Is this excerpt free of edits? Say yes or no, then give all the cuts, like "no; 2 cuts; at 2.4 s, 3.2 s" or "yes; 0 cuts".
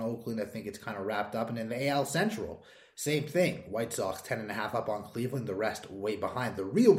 yes; 0 cuts